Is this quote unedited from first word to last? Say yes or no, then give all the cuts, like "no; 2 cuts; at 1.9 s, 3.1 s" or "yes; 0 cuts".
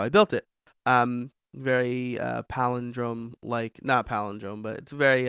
yes; 0 cuts